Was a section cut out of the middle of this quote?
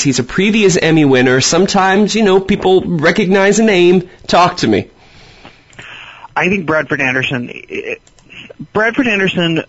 yes; 1 cut; at 6.3 s

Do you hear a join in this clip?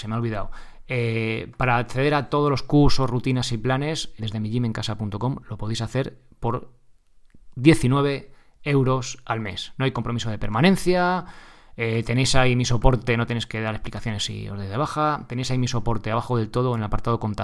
yes; 1 cut; at 4.2 s

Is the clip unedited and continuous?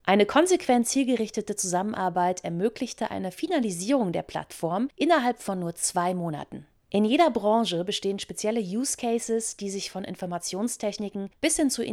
yes; 0 cuts

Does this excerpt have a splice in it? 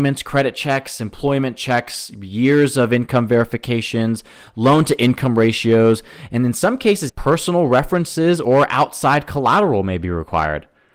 yes; 1 cut; at 7.1 s

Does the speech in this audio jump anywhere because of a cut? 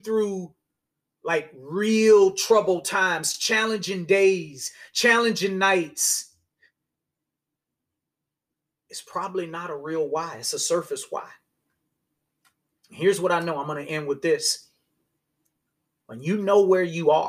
no; 0 cuts

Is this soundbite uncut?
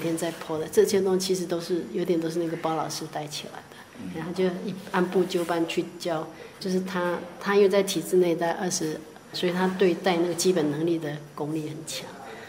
no; 2 cuts; at 6.6 s, 9.3 s

